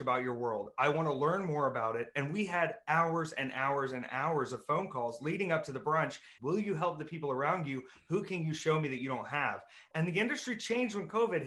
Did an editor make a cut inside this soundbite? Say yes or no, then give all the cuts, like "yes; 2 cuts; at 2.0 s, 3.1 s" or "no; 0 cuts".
yes; 2 cuts; at 6.4 s, 9.9 s